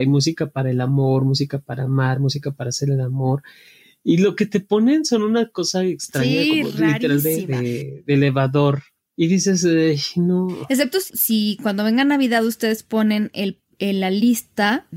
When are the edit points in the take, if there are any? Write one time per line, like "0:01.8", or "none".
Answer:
none

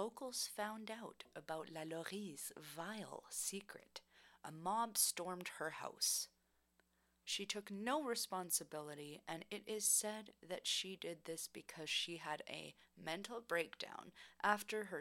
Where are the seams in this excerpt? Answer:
0:07.2

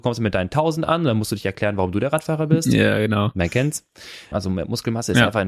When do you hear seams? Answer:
0:04.3

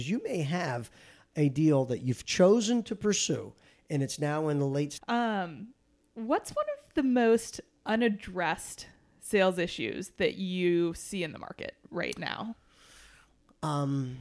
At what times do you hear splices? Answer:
0:05.0

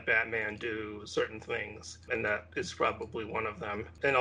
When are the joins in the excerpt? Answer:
none

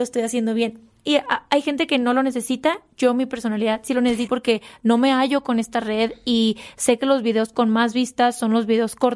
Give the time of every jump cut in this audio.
0:04.3

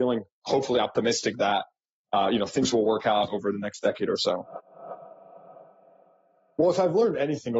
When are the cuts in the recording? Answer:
none

